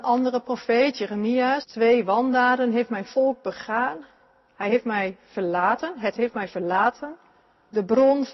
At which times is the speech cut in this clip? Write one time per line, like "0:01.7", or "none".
0:01.6

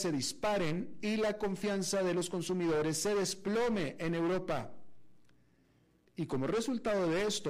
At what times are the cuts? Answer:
0:06.1

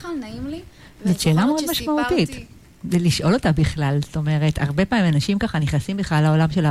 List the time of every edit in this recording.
none

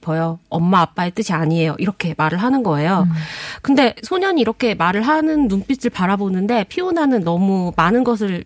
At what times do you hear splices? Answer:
none

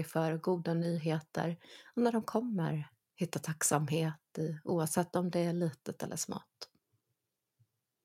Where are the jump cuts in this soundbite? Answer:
none

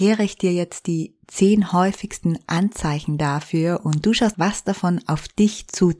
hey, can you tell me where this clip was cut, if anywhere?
0:04.3

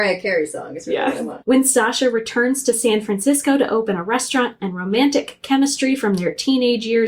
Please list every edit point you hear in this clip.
0:01.4

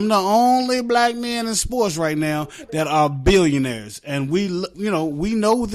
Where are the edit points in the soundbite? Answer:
0:04.7

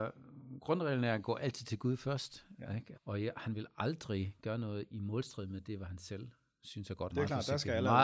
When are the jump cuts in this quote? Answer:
0:02.9
0:07.1

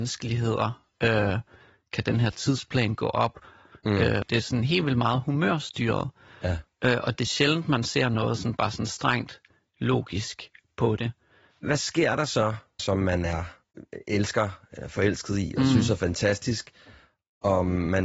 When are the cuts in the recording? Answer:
0:04.2
0:11.5
0:12.8

